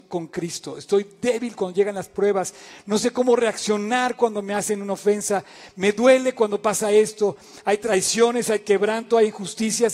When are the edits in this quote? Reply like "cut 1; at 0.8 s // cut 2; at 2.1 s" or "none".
none